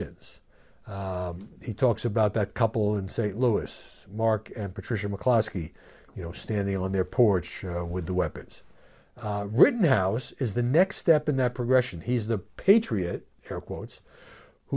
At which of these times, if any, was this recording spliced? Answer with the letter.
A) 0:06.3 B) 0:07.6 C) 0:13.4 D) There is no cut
D